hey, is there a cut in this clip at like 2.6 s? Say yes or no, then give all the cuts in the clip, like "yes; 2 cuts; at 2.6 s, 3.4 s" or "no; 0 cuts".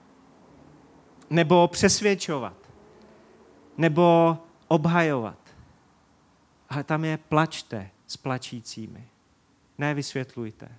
no; 0 cuts